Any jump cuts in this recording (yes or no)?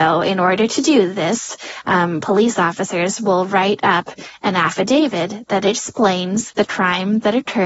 no